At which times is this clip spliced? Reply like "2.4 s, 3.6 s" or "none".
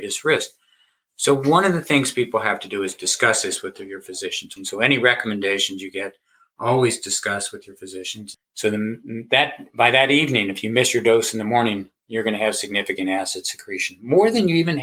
4.6 s, 8.3 s